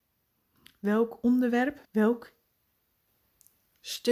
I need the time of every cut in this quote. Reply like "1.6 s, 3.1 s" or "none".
1.8 s